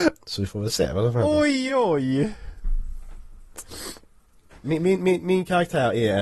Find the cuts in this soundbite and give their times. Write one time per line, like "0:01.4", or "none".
0:01.7
0:04.6